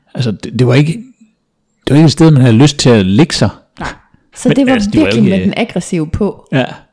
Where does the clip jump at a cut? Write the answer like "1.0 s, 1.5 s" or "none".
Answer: 4.3 s